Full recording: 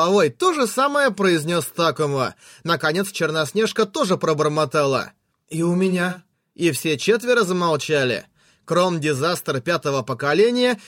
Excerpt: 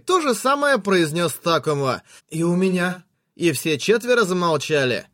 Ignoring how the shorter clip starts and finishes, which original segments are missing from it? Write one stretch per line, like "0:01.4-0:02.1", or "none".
0:02.5-0:05.4